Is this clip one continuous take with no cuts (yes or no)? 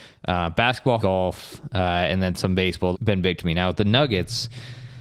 no